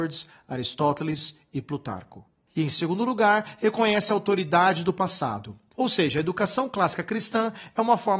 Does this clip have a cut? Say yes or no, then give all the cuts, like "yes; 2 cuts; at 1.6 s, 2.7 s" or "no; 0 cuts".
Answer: yes; 2 cuts; at 2.5 s, 5.7 s